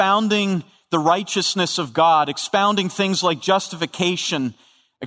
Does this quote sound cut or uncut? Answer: uncut